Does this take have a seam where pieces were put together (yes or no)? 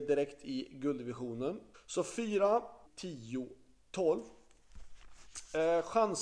yes